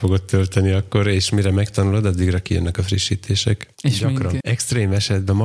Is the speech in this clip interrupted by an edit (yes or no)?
yes